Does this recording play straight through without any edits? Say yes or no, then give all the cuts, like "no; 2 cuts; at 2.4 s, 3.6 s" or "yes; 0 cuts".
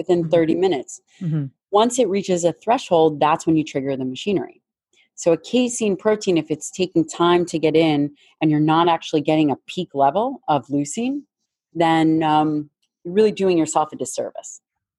yes; 0 cuts